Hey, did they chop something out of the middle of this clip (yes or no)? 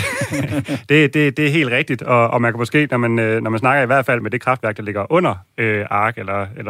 yes